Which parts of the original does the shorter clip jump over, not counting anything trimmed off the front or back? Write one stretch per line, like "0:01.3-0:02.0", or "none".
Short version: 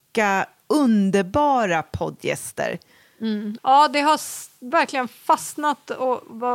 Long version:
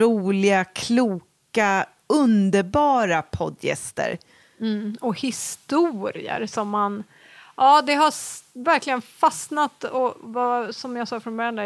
0:05.0-0:07.5